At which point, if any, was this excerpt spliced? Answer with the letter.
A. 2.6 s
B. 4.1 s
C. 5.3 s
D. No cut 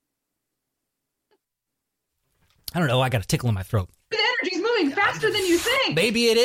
B